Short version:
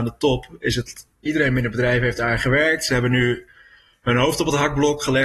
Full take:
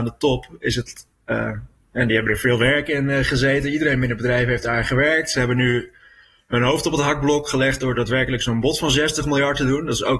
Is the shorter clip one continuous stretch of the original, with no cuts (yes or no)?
no